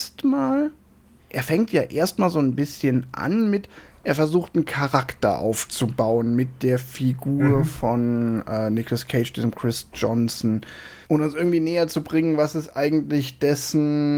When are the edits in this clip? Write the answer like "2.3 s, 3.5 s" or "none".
1.2 s, 11.0 s